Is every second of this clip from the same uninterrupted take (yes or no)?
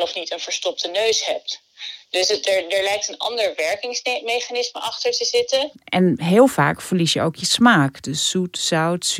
yes